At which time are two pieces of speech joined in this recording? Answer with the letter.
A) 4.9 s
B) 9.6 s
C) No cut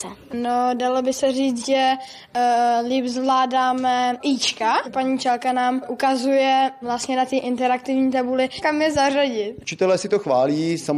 B